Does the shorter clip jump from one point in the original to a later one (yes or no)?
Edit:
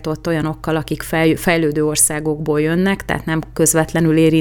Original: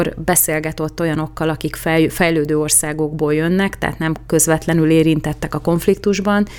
no